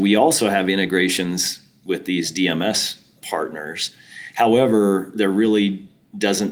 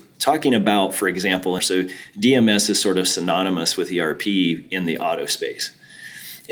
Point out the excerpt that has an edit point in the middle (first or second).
second